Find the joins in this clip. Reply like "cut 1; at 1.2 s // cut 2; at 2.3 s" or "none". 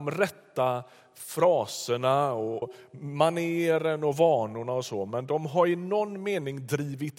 cut 1; at 2.6 s

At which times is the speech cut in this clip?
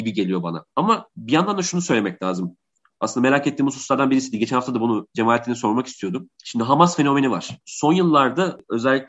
none

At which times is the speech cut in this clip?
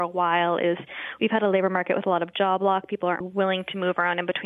cut 1; at 3.2 s

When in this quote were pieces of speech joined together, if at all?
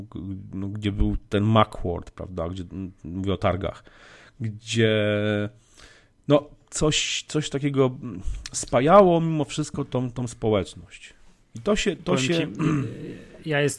none

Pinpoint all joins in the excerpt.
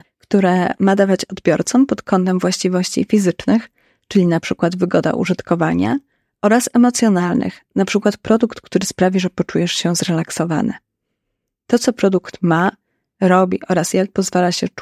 none

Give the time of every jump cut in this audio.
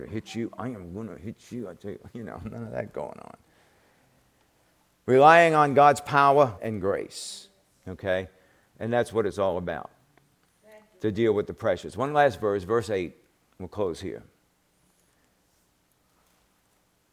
cut 1; at 6.6 s

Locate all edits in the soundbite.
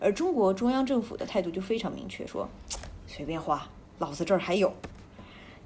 none

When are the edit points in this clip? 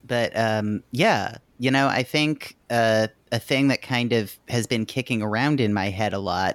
none

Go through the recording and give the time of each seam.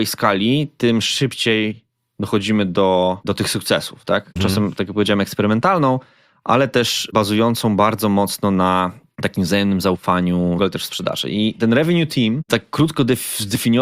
cut 1; at 4.4 s // cut 2; at 10.6 s

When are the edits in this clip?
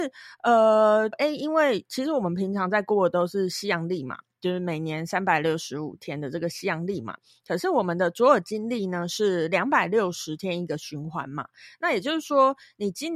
cut 1; at 1.1 s

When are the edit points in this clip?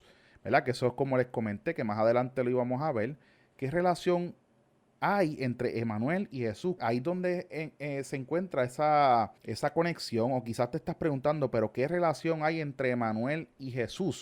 cut 1; at 6.8 s // cut 2; at 9.4 s

